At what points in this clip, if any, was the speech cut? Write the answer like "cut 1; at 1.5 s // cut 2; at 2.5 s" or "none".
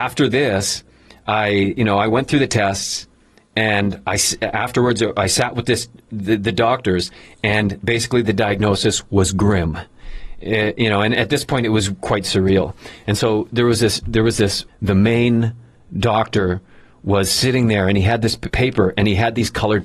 cut 1; at 14.7 s // cut 2; at 18.5 s